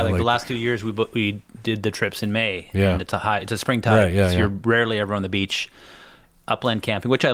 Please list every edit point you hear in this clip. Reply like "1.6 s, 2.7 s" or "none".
none

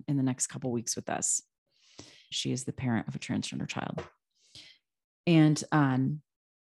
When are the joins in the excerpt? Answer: 2.3 s

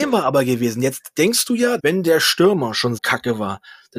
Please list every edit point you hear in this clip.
1.8 s, 3.0 s

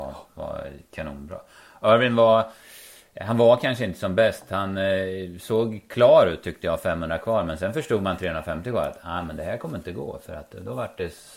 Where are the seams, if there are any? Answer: none

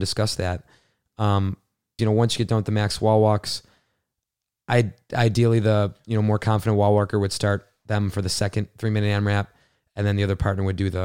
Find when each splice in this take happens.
2.0 s

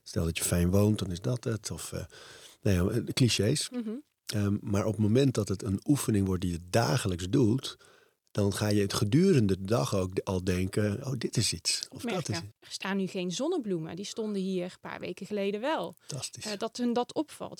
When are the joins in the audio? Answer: 11.0 s, 12.5 s

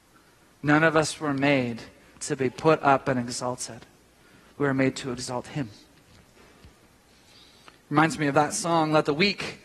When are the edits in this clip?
none

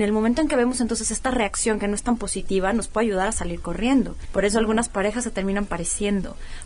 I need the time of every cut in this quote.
4.2 s

